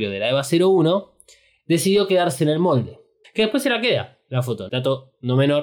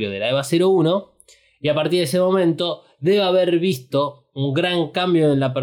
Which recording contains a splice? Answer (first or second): first